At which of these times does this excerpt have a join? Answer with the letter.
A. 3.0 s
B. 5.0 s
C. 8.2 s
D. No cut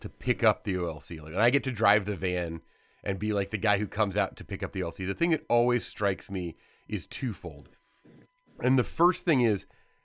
D